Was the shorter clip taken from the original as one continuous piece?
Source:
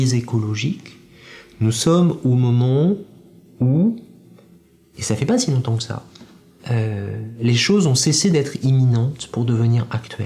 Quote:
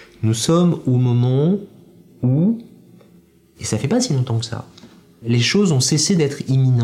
no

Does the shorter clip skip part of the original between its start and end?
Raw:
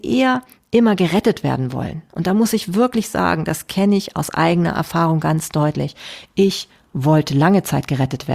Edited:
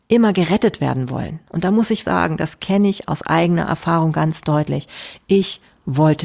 yes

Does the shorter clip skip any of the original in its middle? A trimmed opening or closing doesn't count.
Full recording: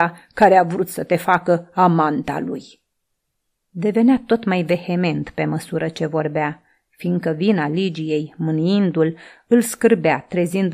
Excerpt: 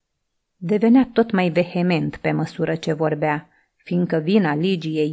no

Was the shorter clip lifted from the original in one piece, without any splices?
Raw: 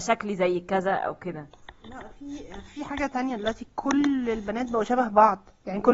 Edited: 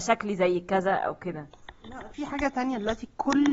no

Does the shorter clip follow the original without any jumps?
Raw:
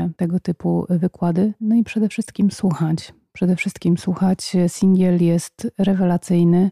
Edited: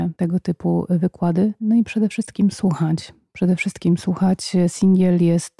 yes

